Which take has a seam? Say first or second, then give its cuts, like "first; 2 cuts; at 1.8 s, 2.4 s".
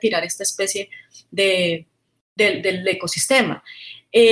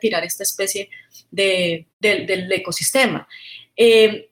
second; 1 cut; at 1.9 s